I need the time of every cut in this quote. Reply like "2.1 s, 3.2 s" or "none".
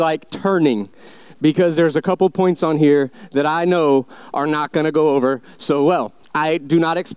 none